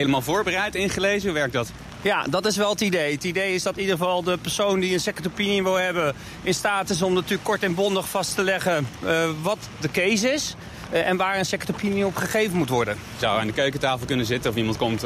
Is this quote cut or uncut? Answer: uncut